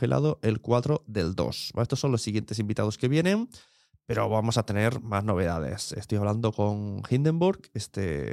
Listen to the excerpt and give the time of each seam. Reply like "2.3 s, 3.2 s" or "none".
none